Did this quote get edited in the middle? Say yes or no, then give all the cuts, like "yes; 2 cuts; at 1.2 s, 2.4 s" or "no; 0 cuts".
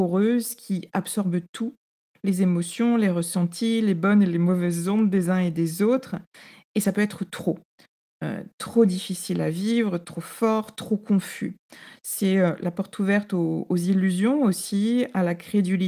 no; 0 cuts